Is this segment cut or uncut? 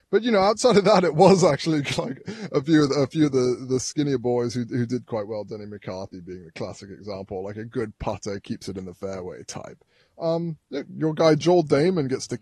uncut